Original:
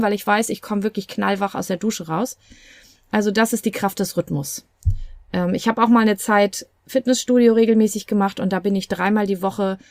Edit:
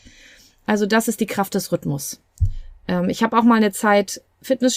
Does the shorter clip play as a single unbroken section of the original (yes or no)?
yes